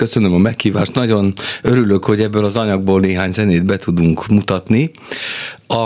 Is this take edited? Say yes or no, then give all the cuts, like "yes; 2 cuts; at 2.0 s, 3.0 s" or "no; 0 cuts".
no; 0 cuts